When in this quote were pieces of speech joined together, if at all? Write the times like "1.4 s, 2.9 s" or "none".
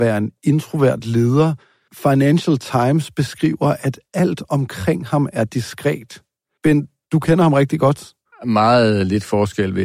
8.3 s